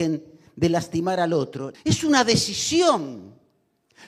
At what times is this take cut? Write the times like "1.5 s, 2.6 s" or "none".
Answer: 1.7 s